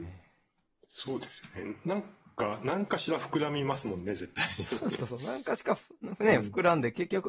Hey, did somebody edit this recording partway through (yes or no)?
yes